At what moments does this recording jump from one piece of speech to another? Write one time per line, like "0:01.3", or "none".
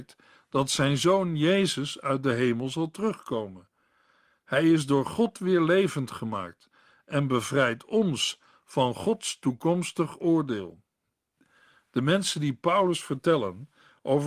none